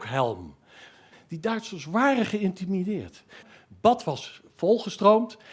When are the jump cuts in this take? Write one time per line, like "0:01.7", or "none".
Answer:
0:01.1
0:03.4